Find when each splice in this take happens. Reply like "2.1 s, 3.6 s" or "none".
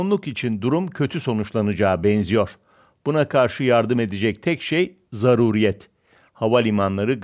none